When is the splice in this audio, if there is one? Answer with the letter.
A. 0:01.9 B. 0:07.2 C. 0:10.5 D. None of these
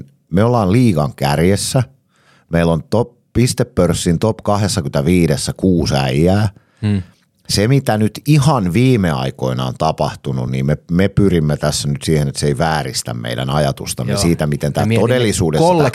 D